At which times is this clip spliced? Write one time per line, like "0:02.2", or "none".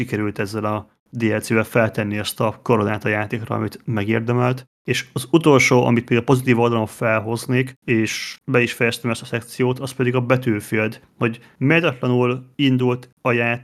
none